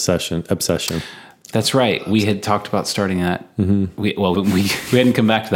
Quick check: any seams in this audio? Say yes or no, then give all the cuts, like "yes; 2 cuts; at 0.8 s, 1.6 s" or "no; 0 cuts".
yes; 1 cut; at 4.3 s